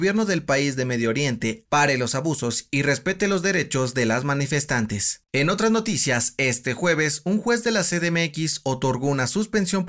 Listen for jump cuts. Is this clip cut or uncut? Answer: cut